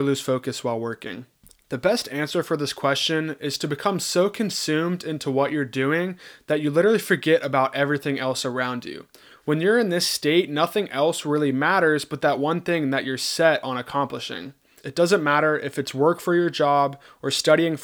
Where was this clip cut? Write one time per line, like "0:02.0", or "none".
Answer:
0:09.3
0:14.8